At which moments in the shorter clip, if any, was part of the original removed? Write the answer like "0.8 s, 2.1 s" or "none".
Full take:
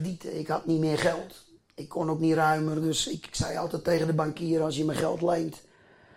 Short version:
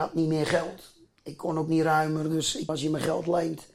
2.7 s